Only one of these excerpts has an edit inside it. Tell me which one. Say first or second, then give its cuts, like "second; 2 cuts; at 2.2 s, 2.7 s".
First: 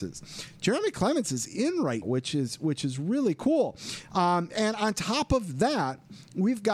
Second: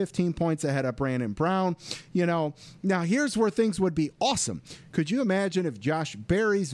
first; 1 cut; at 2.0 s